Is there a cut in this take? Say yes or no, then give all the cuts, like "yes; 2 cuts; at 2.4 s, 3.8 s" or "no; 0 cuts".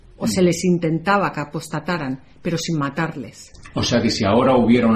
no; 0 cuts